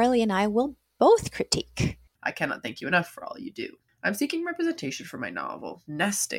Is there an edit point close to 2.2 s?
yes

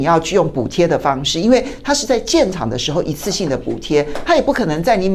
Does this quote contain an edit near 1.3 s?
no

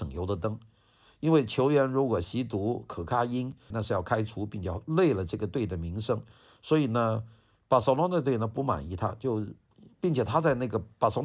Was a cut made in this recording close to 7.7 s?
no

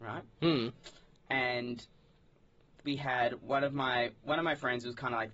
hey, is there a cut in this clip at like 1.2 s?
yes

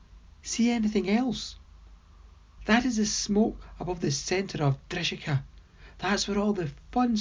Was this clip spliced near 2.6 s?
yes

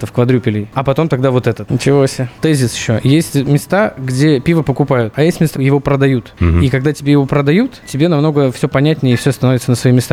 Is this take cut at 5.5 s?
yes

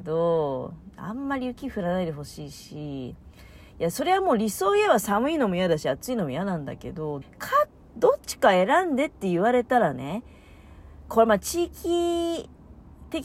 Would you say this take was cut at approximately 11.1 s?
yes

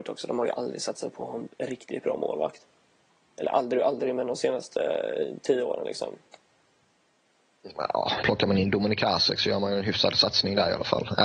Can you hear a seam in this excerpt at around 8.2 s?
yes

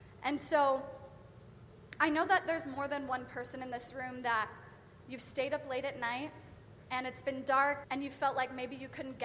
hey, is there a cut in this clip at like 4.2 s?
no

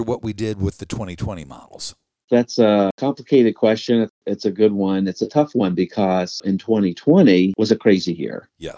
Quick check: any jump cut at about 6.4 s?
yes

